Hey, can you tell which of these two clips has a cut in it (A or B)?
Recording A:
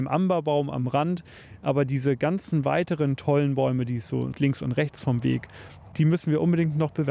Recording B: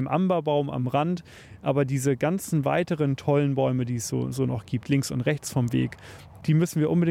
A